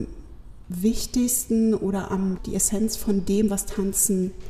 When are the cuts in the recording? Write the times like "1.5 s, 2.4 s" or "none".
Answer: 2.4 s